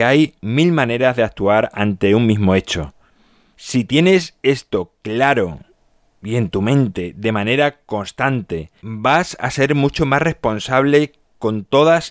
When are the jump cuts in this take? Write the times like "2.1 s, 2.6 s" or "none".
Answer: 3.5 s, 8.8 s